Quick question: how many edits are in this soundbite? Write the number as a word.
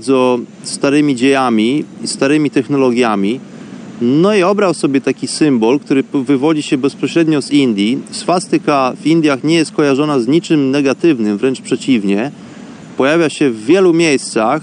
zero